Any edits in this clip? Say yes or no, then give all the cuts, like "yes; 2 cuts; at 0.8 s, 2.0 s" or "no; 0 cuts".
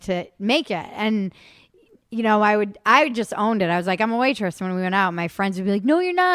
no; 0 cuts